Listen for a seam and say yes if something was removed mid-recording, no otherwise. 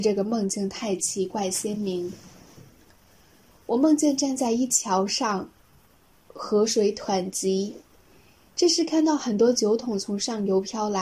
no